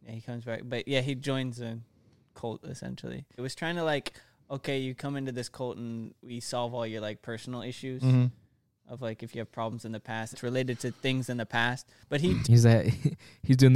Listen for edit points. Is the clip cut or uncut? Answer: cut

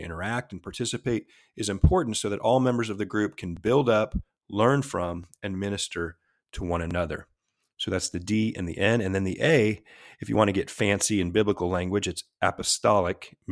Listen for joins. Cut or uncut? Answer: uncut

